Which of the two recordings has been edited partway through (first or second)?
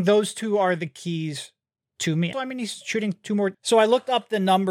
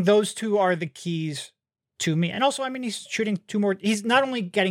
first